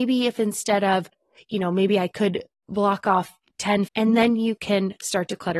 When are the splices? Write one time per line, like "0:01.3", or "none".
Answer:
0:03.9